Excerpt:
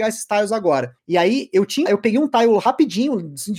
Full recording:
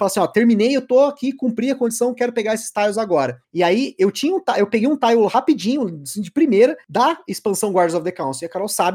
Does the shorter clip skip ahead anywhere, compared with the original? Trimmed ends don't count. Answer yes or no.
yes